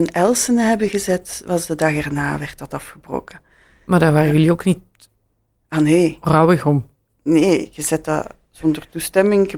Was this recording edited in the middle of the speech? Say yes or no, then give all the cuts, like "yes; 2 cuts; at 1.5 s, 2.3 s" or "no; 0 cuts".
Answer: no; 0 cuts